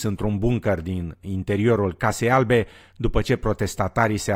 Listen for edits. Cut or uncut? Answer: uncut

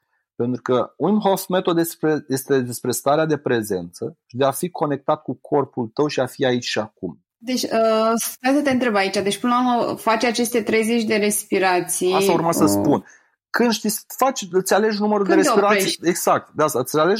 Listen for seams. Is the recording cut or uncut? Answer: uncut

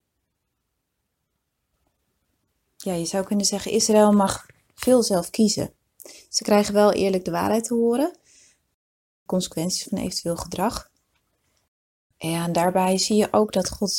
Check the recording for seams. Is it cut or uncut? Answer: uncut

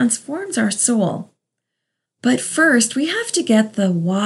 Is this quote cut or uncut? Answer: cut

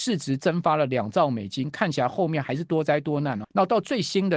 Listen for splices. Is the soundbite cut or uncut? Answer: cut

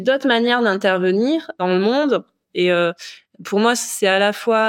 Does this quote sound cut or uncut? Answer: cut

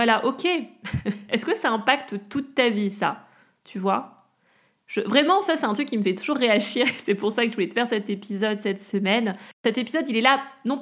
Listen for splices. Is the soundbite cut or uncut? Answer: uncut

